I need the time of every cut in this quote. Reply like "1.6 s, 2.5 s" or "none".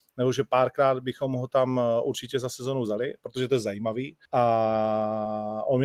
4.2 s